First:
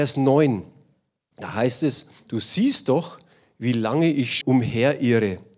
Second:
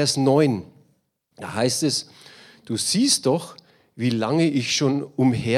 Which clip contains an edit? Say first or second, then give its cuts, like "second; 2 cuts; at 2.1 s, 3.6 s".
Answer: first; 2 cuts; at 2.2 s, 4.4 s